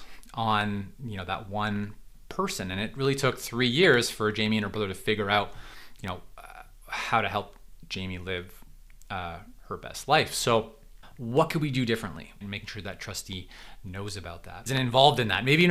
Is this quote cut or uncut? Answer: cut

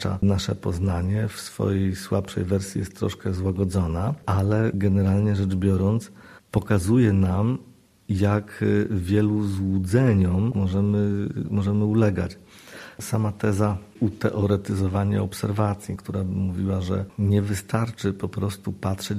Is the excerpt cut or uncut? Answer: uncut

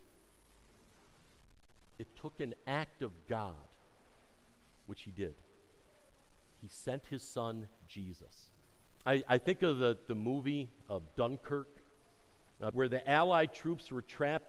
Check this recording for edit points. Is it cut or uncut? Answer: cut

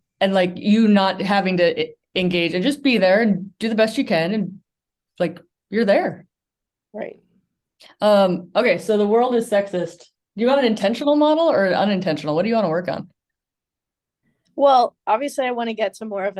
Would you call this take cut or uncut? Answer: uncut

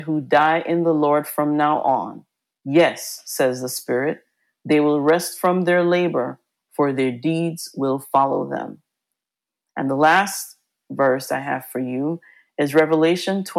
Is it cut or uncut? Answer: uncut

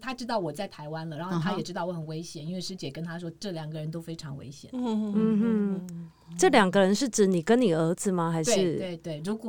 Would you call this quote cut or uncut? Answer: uncut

